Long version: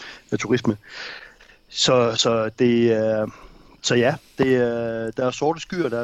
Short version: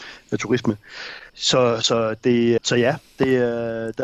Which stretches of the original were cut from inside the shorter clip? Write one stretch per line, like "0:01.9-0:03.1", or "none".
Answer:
0:01.3-0:01.6
0:02.9-0:03.8

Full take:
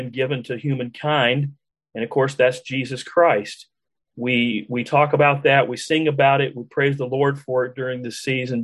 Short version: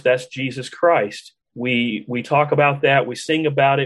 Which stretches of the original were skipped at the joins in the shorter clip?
0:03.8-0:04.0

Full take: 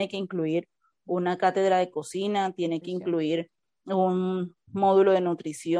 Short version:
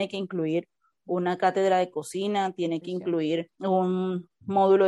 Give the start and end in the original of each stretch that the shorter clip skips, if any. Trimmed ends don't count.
0:03.6-0:03.8

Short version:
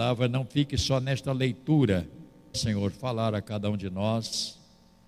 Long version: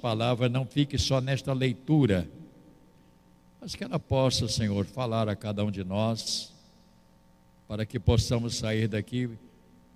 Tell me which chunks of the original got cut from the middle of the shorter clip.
0:02.7-0:04.5

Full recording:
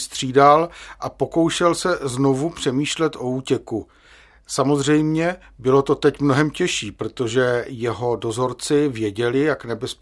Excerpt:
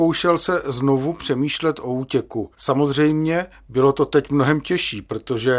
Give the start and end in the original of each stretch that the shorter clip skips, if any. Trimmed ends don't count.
0:03.9-0:04.4

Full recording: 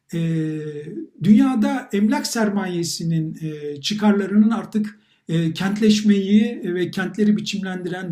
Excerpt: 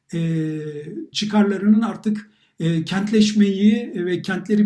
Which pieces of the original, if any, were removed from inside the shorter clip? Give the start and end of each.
0:01.1-0:03.8

